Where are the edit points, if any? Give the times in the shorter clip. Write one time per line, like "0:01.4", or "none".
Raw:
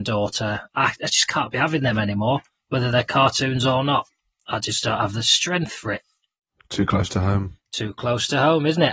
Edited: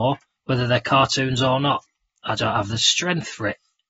0:02.4